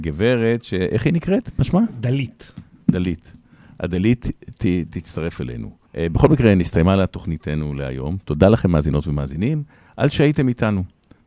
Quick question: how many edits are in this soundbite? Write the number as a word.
one